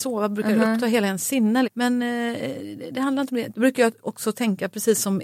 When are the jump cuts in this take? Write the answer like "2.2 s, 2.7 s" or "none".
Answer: 1.6 s, 3.5 s